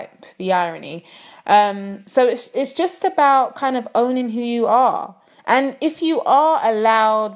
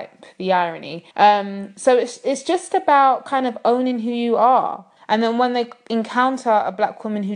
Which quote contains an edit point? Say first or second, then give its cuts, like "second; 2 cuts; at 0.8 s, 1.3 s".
second; 2 cuts; at 1.1 s, 5.0 s